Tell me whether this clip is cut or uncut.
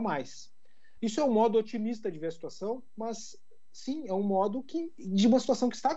uncut